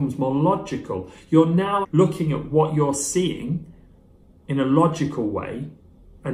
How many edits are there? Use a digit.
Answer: 1